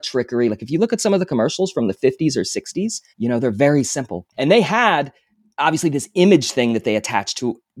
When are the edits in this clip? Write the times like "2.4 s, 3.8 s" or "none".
3.1 s, 4.3 s